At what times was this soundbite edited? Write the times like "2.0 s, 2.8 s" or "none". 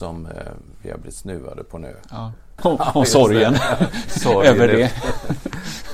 2.6 s